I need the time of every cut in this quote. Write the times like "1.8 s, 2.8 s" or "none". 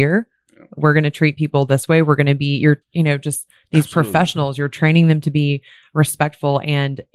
2.8 s